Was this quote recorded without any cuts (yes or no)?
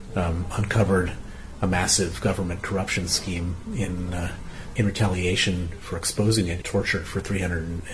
no